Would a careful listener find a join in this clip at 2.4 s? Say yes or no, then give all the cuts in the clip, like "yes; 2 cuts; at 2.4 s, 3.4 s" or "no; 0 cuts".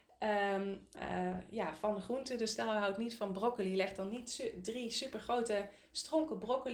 no; 1 cut; at 0.9 s